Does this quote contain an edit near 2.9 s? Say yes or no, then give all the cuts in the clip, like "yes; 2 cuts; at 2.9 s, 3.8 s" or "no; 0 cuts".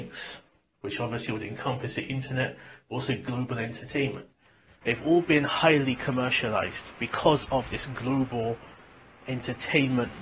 no; 1 cut; at 4.8 s